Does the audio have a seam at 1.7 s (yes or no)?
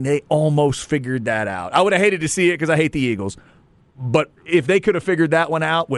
no